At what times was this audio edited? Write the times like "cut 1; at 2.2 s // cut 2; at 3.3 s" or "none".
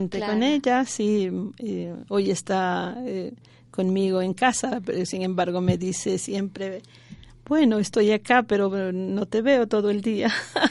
none